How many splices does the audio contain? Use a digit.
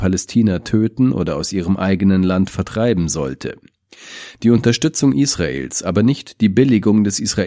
1